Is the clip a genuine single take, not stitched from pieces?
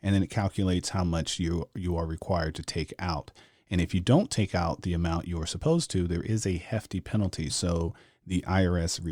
no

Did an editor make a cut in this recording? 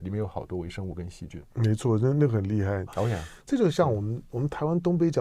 yes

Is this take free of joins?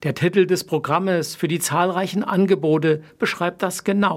yes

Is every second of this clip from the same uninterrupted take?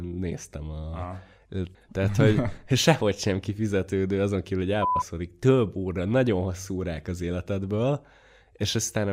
no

